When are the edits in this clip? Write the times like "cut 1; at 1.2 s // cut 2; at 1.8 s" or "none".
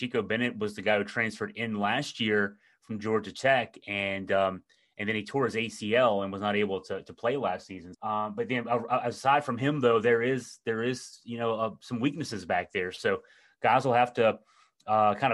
cut 1; at 7.9 s